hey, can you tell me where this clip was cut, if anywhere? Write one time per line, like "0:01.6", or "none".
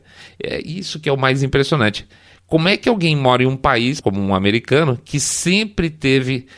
0:04.0